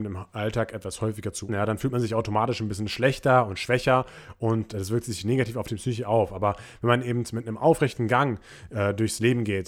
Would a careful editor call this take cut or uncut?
cut